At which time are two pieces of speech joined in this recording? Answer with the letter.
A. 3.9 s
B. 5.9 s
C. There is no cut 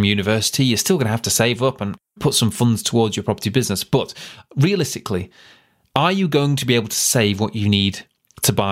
C